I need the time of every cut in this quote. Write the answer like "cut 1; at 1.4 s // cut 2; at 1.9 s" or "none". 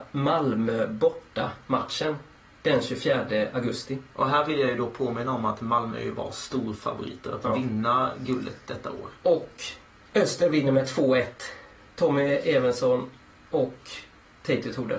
cut 1; at 9.2 s